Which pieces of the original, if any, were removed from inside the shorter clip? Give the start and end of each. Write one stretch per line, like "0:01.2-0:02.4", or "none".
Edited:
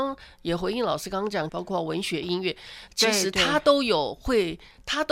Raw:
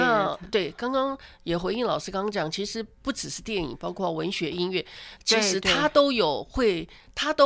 0:02.5-0:03.8

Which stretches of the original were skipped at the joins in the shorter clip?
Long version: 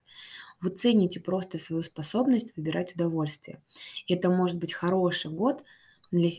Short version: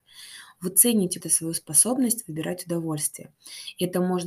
0:01.2-0:01.5

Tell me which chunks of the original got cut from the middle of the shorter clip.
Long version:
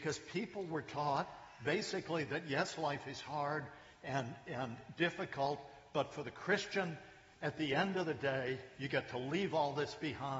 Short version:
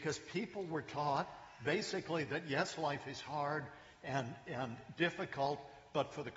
none

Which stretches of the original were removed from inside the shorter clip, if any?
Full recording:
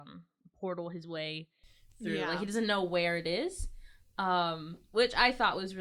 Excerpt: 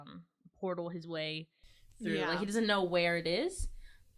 none

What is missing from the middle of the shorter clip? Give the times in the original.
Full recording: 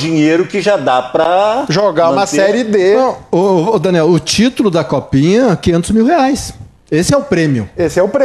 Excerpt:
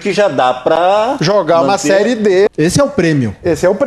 0:03.0-0:06.8

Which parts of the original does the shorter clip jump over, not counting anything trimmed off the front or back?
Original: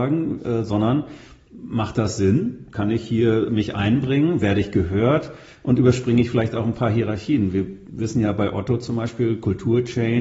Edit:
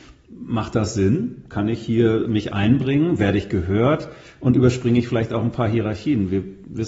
none

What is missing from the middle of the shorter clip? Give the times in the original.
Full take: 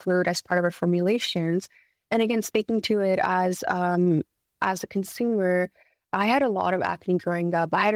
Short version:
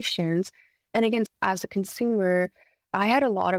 0:02.4-0:04.5

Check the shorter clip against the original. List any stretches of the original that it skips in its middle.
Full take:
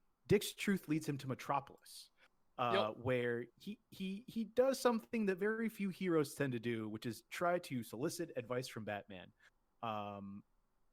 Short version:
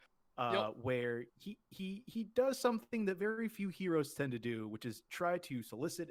none

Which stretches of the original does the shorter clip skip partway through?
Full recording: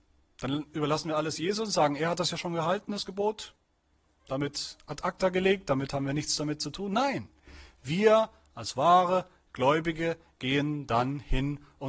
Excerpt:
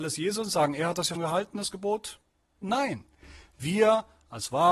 0:02.4-0:02.5
0:04.0-0:06.9

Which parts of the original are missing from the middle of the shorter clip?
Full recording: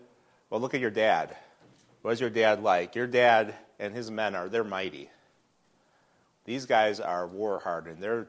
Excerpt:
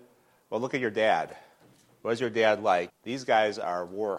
0:02.9-0:06.3

